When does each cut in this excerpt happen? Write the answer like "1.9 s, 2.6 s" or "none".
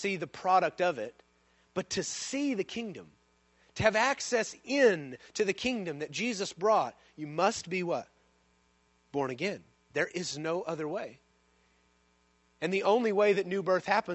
none